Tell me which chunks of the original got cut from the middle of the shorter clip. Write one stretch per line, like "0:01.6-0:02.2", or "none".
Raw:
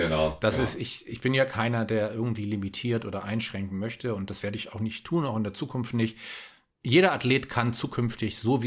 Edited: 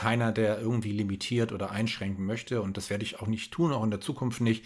none